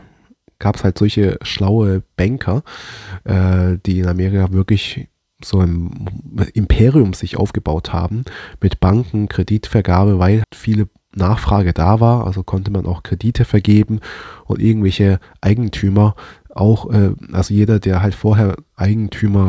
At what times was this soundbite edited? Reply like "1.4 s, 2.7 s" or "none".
10.4 s